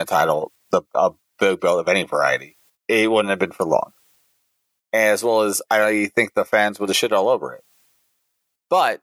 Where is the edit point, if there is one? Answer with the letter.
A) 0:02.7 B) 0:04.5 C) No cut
A